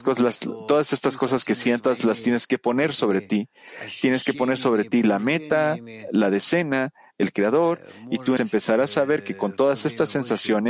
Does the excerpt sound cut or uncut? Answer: cut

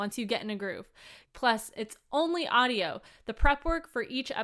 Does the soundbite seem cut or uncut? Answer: cut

